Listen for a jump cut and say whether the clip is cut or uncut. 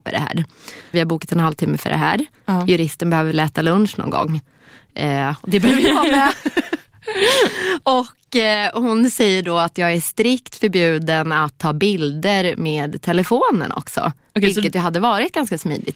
cut